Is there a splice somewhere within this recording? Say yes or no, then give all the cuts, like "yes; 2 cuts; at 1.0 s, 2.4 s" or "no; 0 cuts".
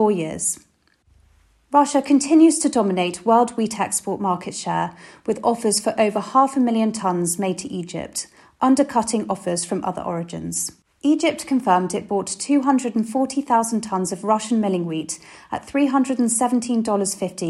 no; 0 cuts